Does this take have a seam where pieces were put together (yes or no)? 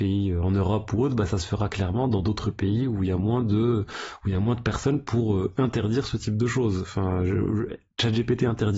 no